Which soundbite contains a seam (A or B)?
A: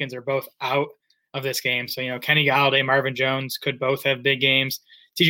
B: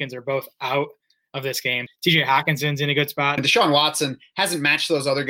B